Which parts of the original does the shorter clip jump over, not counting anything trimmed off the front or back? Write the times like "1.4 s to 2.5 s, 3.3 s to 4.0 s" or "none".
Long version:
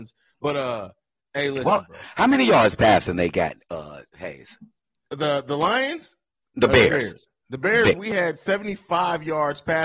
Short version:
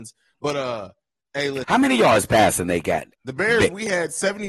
1.6 s to 2.1 s, 3.6 s to 7.4 s